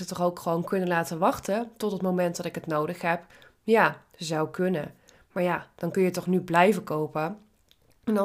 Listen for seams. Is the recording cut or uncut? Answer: cut